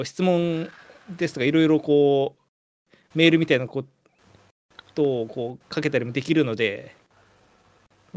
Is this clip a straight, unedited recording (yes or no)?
yes